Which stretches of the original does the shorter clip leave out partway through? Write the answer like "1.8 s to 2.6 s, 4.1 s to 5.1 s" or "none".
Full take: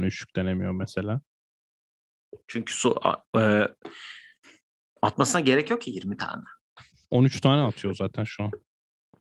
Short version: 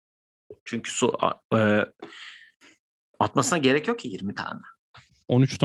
none

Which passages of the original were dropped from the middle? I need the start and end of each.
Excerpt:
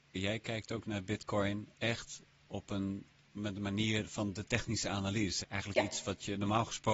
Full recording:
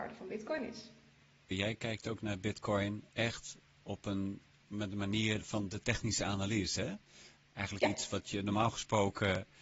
6.8 s to 7.5 s

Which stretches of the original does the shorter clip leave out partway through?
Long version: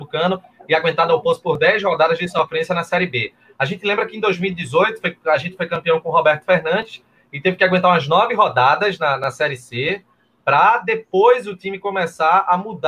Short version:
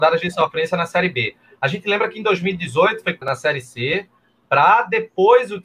5.2 s to 9.2 s

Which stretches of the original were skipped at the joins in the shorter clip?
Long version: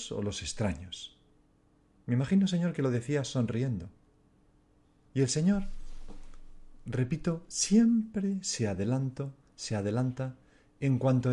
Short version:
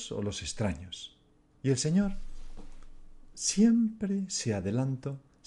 1.5 s to 5.0 s, 6.8 s to 7.5 s

